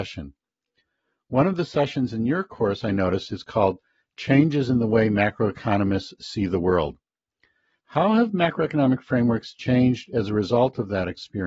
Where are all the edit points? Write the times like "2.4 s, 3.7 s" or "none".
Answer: none